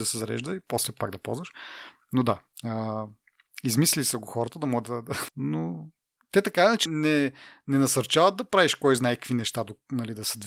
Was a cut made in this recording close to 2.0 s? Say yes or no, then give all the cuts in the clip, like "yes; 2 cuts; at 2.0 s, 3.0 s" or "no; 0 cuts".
no; 2 cuts; at 5.3 s, 6.9 s